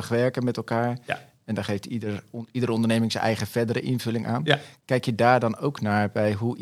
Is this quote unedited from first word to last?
yes; 0 cuts

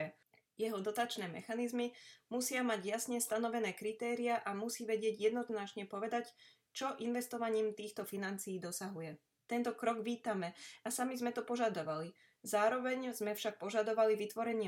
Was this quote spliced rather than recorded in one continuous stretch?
yes; 1 cut; at 9.4 s

